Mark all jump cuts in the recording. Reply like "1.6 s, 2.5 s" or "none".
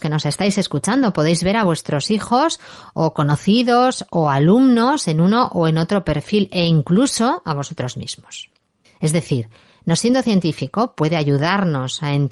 none